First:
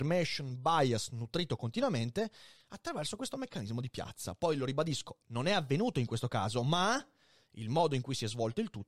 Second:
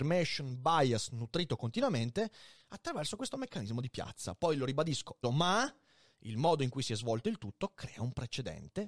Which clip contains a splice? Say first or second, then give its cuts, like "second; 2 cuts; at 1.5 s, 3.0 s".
second; 1 cut; at 5.2 s